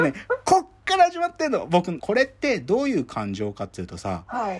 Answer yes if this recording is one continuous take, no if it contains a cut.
no